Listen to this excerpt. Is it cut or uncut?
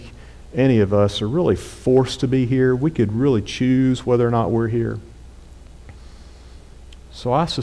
uncut